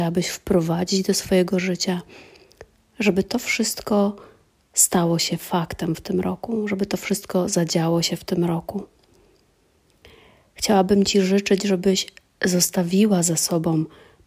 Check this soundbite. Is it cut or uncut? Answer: uncut